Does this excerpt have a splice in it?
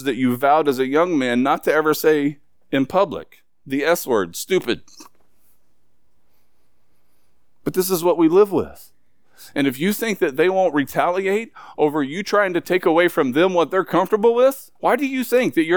yes; 1 cut; at 14.8 s

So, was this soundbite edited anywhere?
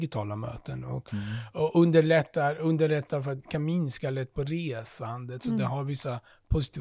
no; 0 cuts

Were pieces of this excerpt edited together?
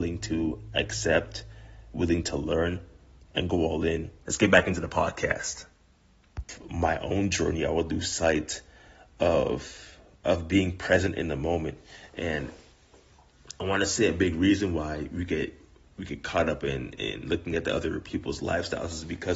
yes; 1 cut; at 4.2 s

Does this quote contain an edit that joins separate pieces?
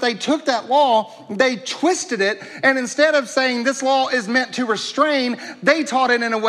no; 0 cuts

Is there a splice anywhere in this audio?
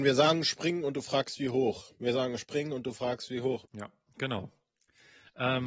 yes; 1 cut; at 3.6 s

